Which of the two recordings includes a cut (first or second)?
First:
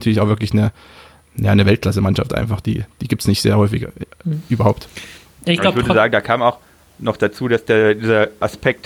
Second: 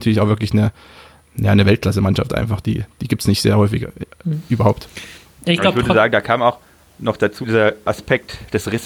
second